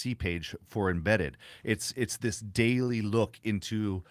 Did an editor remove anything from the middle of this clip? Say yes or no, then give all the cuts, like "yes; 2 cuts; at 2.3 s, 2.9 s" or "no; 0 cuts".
no; 0 cuts